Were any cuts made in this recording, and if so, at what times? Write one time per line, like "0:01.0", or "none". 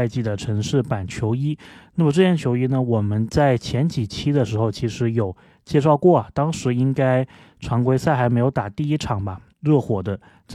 0:09.5